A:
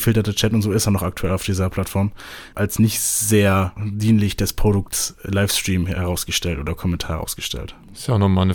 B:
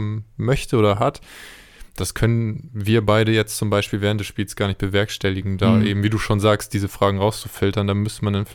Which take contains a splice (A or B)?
A